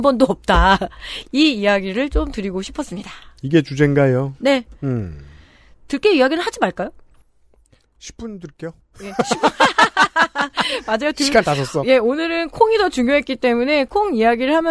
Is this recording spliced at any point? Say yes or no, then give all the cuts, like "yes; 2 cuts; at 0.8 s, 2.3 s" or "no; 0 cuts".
no; 0 cuts